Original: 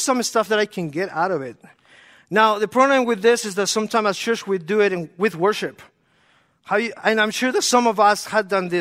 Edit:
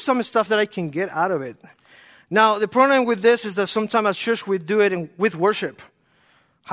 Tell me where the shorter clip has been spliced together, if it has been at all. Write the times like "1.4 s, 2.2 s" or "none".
none